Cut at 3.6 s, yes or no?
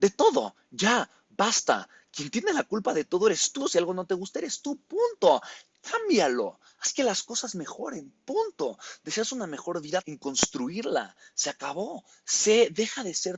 yes